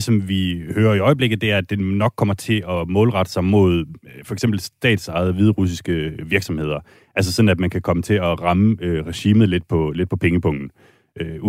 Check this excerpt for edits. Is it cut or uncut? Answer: uncut